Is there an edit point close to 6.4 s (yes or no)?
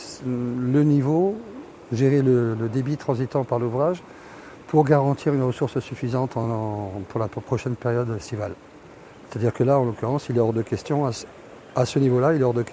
no